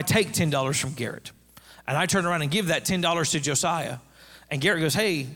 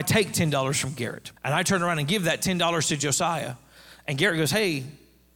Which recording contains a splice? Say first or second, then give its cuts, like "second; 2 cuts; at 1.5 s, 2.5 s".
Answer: second; 1 cut; at 1.4 s